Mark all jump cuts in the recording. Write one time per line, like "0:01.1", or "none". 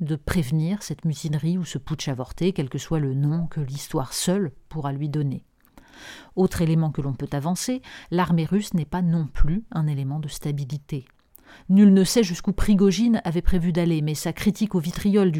none